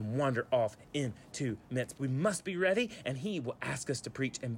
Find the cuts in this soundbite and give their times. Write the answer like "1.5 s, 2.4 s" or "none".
1.9 s